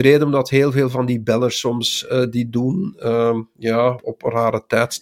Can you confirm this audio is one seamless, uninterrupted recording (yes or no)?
no